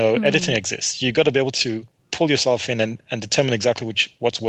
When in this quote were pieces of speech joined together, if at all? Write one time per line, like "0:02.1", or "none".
none